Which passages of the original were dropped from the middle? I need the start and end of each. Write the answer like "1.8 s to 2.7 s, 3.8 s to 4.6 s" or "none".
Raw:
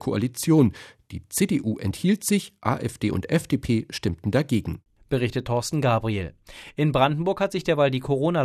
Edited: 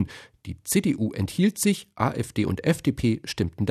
none